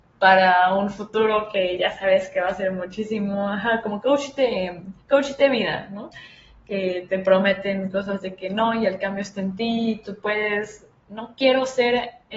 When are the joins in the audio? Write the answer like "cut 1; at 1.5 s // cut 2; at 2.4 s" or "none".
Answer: none